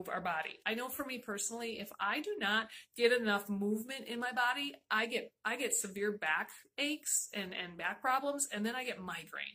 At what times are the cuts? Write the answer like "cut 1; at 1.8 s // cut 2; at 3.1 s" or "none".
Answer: none